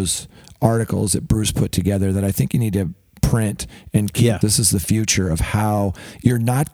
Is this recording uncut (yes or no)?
no